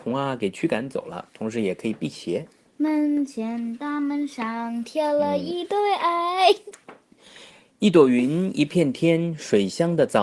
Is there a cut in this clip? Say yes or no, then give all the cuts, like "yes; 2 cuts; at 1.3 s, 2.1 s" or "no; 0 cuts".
no; 0 cuts